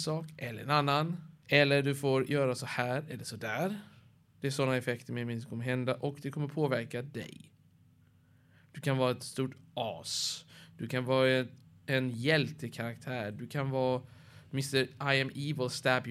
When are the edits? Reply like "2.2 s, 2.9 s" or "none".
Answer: none